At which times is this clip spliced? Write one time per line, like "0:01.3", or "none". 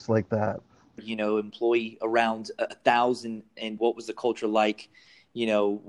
0:01.0
0:03.8